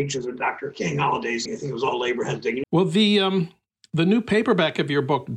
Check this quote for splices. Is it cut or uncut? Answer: cut